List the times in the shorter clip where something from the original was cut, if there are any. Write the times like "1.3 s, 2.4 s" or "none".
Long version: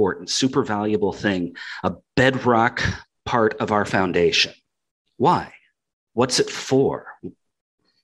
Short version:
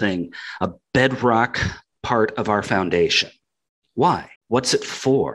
4.4 s